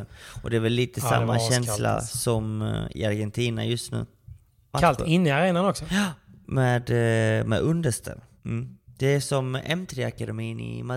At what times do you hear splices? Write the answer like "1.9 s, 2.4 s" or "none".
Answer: 4.7 s